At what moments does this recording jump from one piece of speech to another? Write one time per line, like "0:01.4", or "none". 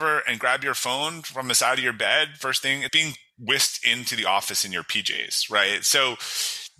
0:02.9